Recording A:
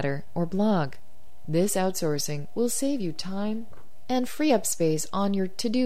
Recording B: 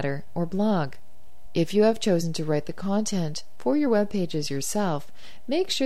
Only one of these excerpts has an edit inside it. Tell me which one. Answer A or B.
A